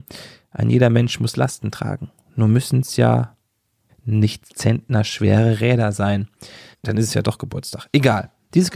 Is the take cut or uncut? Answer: cut